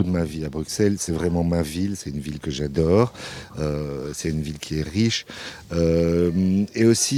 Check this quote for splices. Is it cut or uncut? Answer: uncut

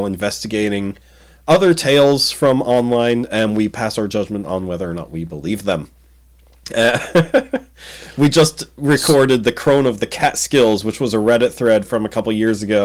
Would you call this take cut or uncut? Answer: uncut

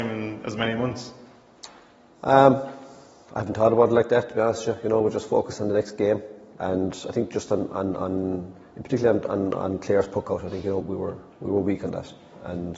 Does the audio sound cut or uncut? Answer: cut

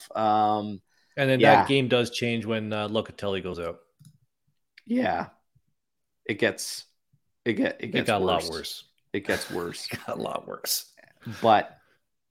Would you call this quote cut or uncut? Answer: uncut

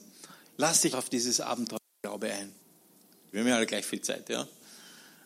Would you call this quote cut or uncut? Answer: cut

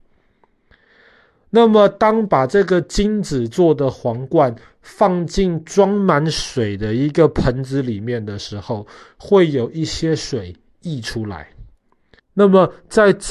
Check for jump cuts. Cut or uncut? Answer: cut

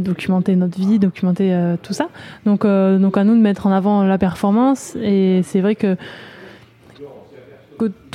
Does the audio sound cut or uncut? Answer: uncut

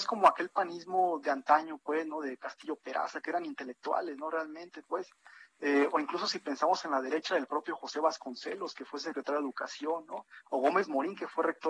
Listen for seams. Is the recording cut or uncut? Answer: uncut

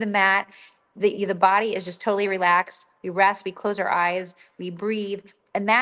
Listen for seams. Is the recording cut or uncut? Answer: uncut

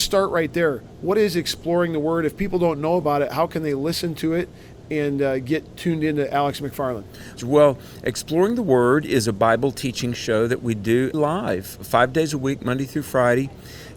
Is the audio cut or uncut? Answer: cut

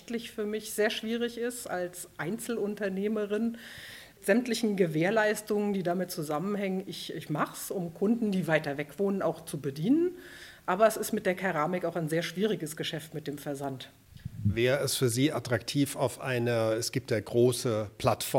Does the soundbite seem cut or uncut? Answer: uncut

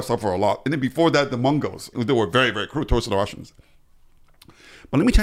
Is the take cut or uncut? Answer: cut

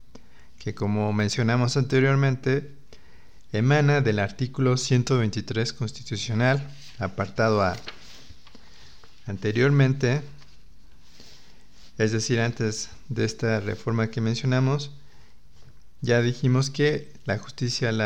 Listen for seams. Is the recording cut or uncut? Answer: uncut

